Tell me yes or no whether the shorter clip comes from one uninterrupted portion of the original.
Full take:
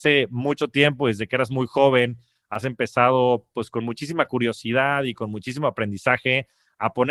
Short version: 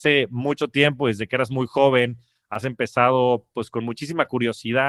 yes